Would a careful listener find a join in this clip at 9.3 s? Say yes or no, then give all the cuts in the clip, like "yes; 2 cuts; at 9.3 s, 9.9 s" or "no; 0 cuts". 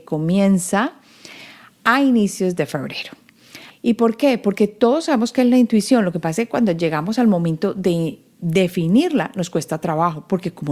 no; 1 cut; at 3.7 s